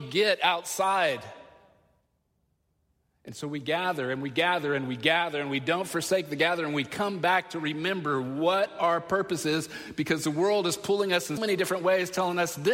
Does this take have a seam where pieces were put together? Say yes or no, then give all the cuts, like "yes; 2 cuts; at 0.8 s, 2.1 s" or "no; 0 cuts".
yes; 1 cut; at 11.4 s